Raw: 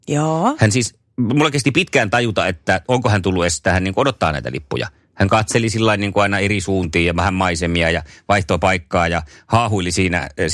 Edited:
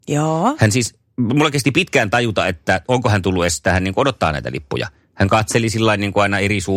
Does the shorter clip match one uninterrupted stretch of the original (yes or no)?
yes